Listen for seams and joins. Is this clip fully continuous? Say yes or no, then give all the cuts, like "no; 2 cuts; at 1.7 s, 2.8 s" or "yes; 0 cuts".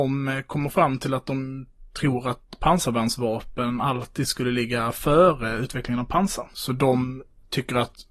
yes; 0 cuts